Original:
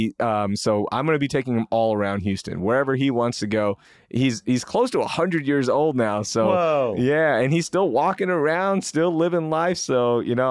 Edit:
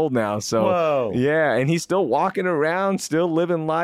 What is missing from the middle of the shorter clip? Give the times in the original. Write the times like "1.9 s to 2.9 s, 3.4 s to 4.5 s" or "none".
none